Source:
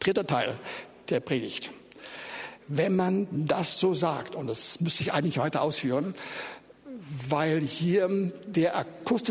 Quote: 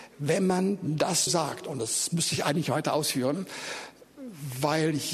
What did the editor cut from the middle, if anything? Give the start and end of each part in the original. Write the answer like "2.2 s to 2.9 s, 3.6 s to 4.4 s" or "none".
3.8 s to 3.9 s